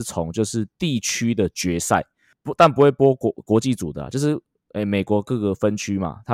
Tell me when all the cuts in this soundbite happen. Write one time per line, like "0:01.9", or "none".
none